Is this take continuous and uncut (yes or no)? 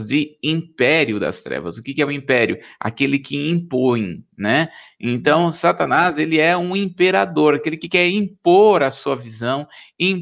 yes